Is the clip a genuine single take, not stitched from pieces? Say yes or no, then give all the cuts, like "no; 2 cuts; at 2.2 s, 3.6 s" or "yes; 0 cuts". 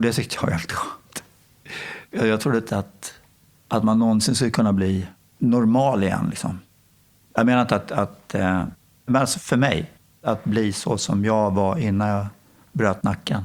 yes; 0 cuts